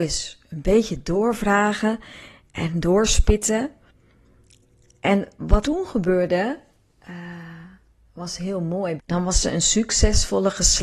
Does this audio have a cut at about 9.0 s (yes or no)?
yes